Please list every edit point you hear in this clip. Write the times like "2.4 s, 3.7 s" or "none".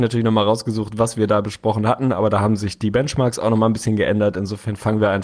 none